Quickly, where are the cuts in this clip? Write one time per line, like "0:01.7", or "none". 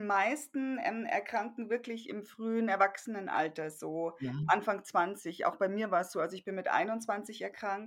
none